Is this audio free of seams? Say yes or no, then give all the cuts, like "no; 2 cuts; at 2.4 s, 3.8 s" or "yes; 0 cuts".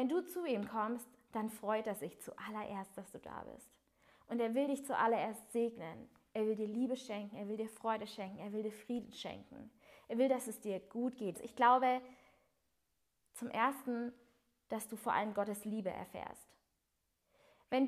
no; 1 cut; at 11.3 s